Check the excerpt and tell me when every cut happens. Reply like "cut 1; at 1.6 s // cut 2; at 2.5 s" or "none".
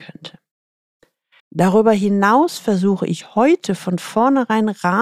cut 1; at 1.4 s